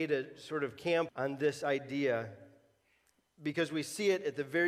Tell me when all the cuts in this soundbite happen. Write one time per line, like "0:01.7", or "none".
0:01.1